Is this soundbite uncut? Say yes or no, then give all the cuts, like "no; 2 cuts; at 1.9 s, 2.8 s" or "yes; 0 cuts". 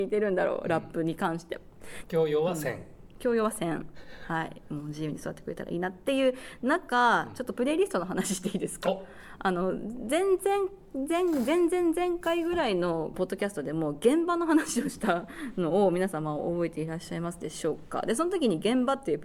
no; 1 cut; at 2.0 s